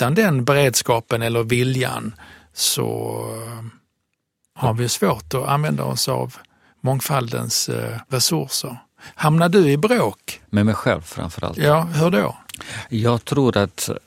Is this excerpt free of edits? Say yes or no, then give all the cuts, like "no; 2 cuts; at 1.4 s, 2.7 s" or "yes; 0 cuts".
yes; 0 cuts